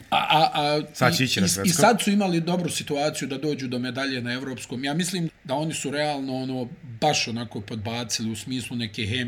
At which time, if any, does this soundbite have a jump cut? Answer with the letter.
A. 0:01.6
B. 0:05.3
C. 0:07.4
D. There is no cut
B